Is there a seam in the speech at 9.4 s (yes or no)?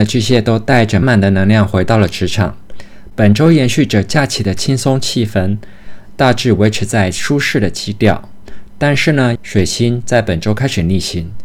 yes